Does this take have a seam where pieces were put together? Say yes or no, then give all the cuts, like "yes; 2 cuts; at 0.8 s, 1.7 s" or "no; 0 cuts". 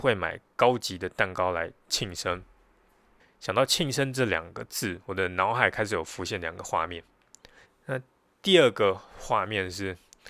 yes; 2 cuts; at 3.2 s, 7.7 s